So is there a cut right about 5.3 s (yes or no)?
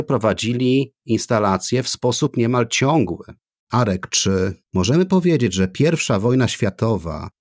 no